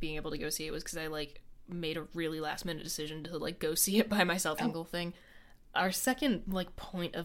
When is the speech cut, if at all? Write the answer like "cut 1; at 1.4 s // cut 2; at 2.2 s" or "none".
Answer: cut 1; at 4.6 s